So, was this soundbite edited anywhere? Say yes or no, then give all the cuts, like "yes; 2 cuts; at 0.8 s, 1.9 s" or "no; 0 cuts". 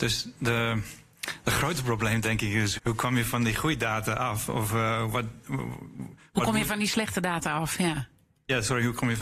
yes; 1 cut; at 2.8 s